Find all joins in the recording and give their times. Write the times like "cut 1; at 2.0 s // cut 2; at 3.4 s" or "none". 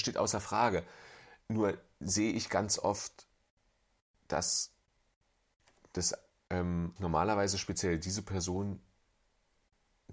cut 1; at 1.4 s // cut 2; at 7.0 s